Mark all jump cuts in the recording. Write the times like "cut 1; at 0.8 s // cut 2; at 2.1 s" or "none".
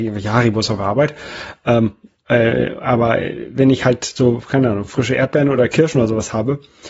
none